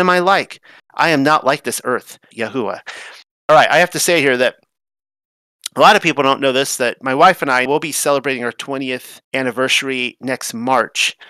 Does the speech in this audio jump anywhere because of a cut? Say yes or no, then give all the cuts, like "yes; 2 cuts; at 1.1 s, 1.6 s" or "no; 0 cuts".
yes; 3 cuts; at 2.3 s, 7.7 s, 9.2 s